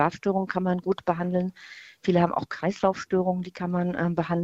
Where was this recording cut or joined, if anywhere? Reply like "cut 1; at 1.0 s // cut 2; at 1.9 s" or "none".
none